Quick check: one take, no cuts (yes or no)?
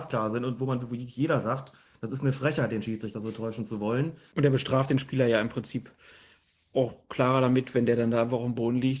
no